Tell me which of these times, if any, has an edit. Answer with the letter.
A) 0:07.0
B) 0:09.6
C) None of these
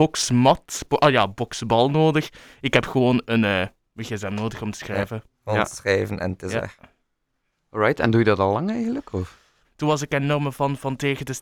B